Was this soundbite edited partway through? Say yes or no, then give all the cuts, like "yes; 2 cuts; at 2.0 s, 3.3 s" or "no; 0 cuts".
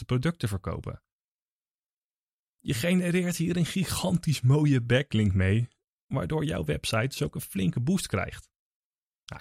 no; 0 cuts